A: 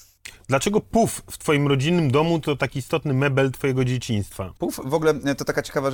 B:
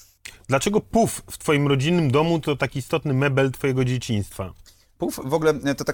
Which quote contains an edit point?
A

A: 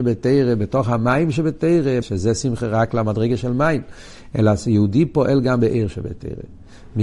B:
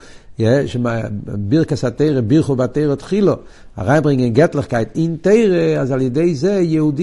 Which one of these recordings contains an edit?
A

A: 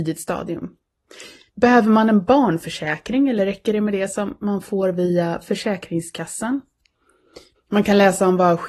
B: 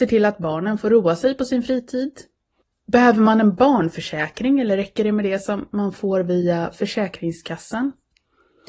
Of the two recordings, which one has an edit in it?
A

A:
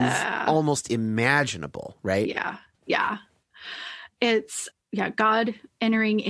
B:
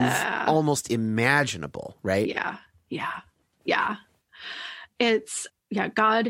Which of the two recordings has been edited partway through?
A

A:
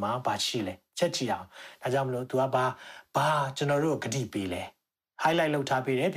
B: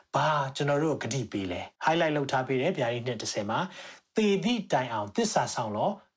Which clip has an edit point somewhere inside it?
B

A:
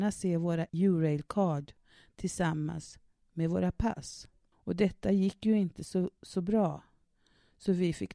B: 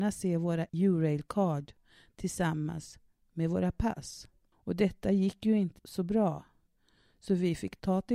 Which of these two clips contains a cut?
B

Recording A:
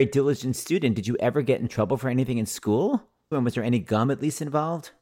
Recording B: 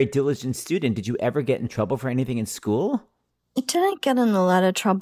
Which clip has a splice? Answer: A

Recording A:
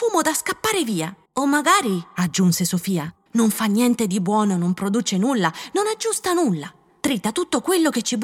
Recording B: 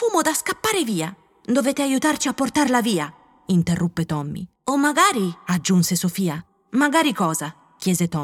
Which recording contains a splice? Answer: A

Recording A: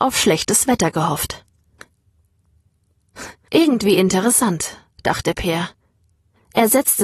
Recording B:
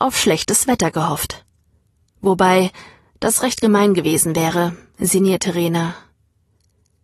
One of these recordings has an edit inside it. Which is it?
A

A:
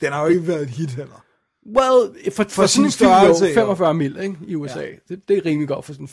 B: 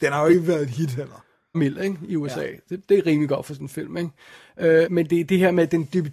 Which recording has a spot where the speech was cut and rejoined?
B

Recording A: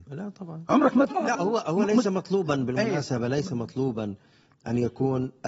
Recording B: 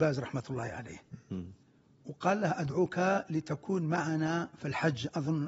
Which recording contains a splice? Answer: A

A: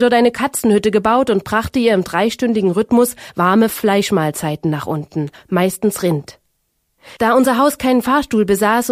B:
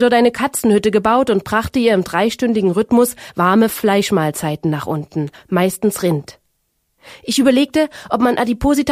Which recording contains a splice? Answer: A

